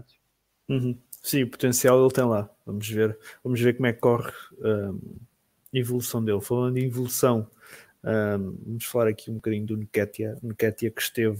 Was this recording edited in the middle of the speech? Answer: no; 0 cuts

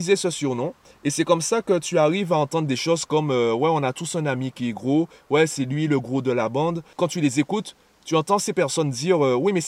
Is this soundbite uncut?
yes; 0 cuts

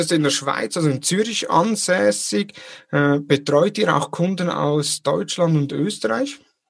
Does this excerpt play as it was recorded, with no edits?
yes; 0 cuts

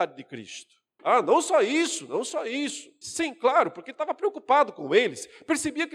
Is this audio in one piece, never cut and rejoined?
no; 2 cuts; at 1.0 s, 3.0 s

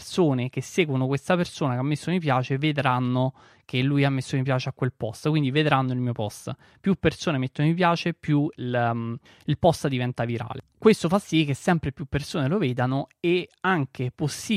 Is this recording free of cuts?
yes; 0 cuts

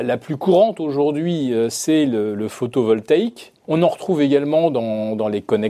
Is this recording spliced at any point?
yes; 1 cut; at 3.6 s

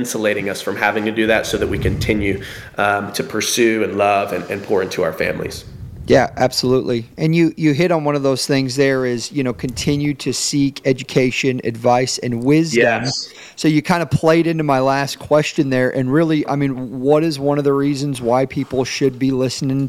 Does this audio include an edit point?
no; 0 cuts

